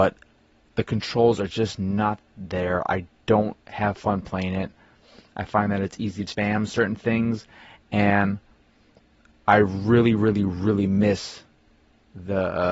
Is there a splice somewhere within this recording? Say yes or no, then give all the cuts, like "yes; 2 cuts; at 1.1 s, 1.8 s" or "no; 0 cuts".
yes; 2 cuts; at 3.6 s, 6.3 s